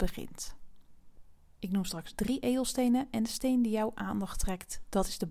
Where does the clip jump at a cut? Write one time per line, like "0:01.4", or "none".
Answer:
0:01.6